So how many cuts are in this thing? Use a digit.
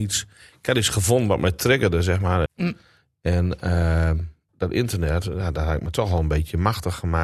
2